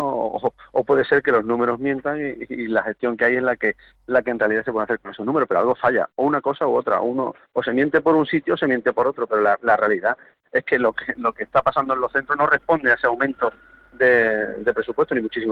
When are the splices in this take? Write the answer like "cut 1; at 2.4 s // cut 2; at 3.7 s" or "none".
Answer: none